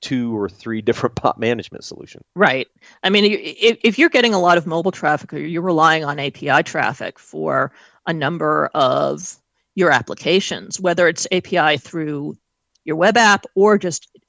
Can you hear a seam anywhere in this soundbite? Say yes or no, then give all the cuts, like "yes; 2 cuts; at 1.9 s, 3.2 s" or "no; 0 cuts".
no; 0 cuts